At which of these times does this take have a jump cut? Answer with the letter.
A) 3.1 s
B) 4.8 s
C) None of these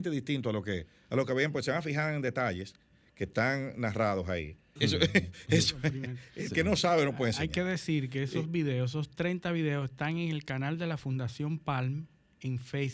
B